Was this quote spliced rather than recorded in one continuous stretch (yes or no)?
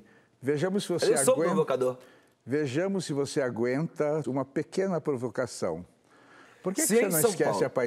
yes